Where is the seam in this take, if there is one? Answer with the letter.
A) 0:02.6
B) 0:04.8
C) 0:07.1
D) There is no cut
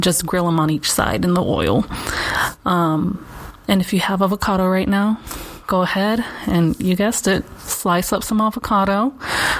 D